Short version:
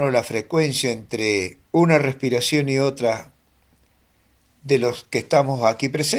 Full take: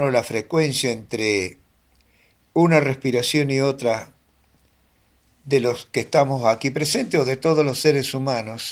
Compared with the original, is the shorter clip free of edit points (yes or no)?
no